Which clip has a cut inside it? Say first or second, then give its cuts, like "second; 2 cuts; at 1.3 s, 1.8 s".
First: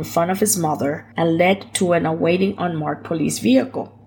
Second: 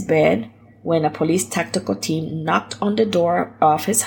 first; 1 cut; at 1.1 s